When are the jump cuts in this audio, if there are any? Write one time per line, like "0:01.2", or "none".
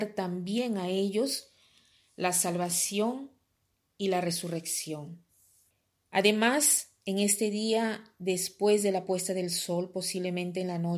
0:07.0